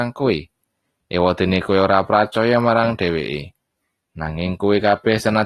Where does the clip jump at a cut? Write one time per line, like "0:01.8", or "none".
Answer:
0:04.1